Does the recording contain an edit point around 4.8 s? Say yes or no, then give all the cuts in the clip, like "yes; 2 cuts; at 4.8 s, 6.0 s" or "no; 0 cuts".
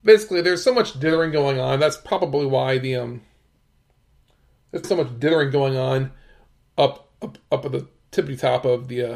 yes; 1 cut; at 4.8 s